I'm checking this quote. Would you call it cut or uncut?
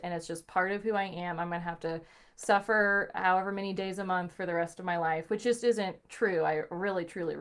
uncut